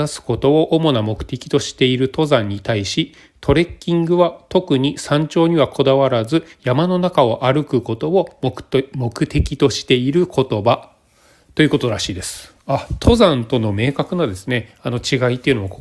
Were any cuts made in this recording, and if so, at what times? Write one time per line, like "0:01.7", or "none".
none